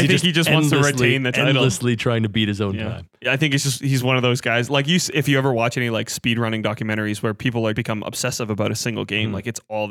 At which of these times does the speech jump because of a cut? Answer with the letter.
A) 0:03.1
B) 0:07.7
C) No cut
B